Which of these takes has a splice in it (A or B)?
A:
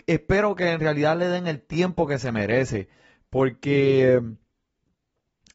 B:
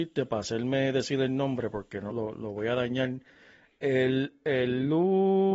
B